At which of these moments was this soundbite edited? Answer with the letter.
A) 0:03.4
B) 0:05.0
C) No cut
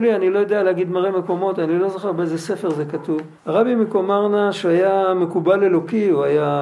A